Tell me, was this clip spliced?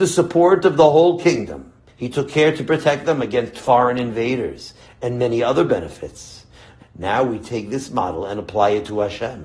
yes; 2 cuts; at 1.9 s, 6.8 s

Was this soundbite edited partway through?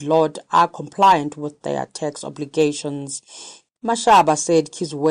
yes; 1 cut; at 3.8 s

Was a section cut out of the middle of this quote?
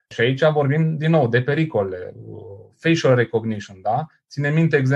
no; 0 cuts

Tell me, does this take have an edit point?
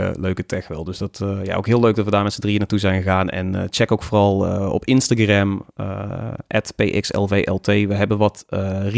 no; 0 cuts

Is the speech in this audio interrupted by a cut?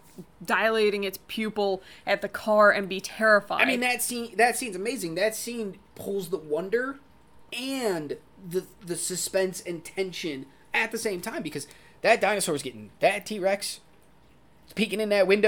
no; 0 cuts

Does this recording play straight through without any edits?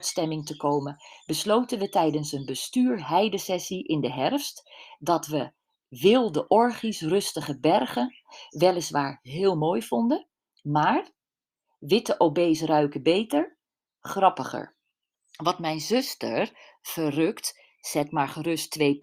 no; 1 cut; at 15.1 s

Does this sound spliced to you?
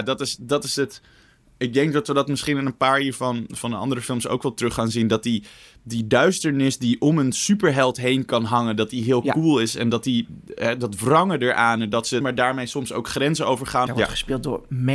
yes; 2 cuts; at 12.2 s, 13.9 s

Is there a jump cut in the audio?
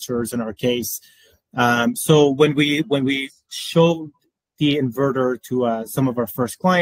no; 0 cuts

